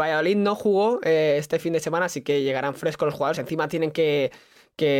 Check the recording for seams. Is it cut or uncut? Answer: uncut